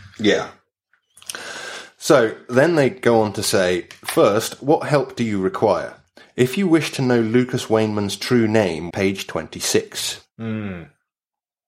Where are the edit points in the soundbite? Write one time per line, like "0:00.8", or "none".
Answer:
0:08.9
0:10.2

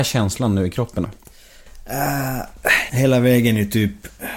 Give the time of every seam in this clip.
0:01.0
0:02.9

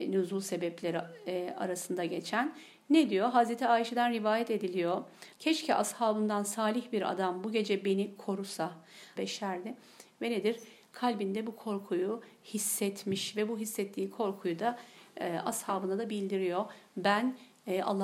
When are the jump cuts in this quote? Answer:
0:05.3
0:09.2

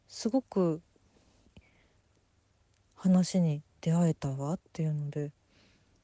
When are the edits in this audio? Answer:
0:01.5
0:03.7

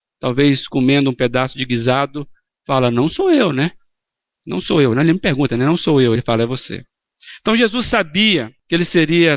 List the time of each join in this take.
none

